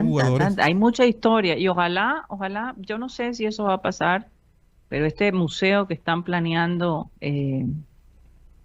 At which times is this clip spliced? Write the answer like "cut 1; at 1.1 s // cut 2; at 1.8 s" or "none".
cut 1; at 7.2 s